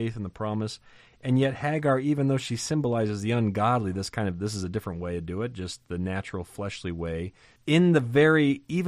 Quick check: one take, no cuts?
no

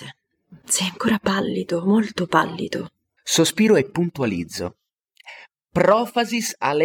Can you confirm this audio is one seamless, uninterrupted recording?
no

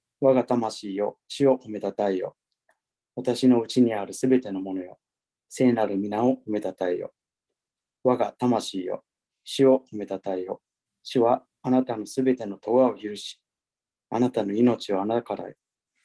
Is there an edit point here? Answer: yes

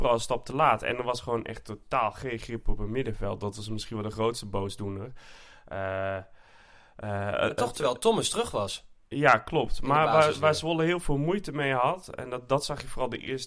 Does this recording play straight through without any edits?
yes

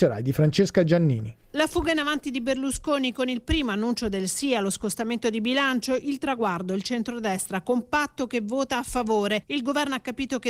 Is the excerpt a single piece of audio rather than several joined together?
no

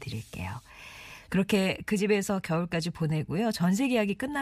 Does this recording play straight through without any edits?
no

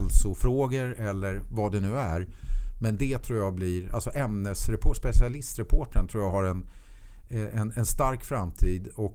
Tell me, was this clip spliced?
no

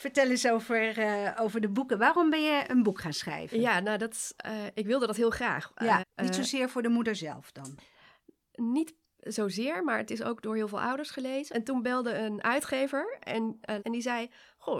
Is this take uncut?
no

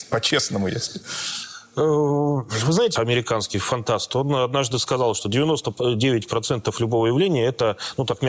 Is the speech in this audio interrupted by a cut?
yes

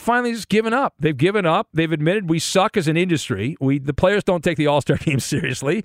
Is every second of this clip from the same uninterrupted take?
no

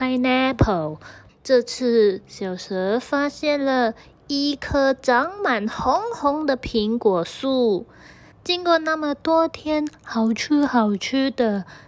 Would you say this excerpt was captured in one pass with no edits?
no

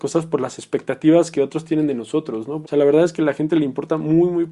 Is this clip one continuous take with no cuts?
no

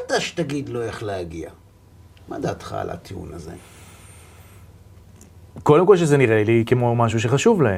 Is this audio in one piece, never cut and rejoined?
yes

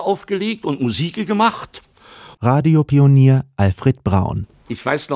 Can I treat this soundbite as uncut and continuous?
no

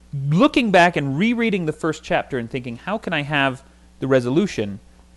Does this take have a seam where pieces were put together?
no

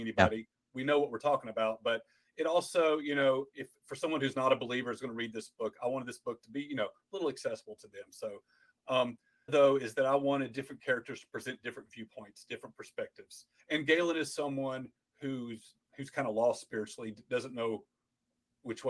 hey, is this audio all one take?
no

